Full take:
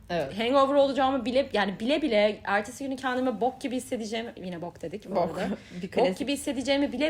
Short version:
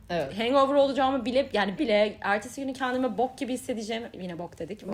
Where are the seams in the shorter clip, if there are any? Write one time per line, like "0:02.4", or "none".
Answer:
0:01.8